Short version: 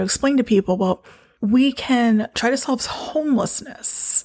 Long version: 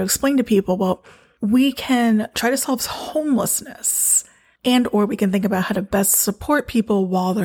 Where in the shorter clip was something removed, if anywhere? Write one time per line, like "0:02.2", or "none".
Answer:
none